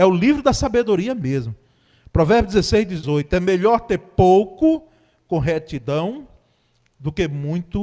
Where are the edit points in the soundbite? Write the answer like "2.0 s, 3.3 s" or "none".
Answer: 3.0 s